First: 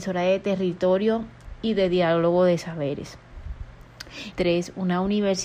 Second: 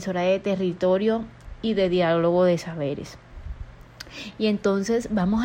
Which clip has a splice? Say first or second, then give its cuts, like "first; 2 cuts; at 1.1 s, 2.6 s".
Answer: first; 1 cut; at 4.3 s